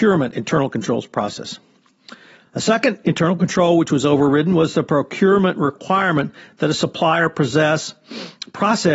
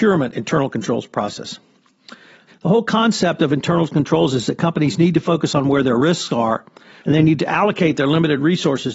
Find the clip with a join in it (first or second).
second